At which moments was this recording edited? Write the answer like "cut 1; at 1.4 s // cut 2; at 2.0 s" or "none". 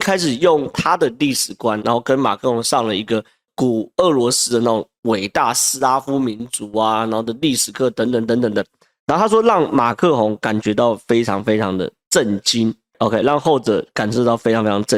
cut 1; at 1.8 s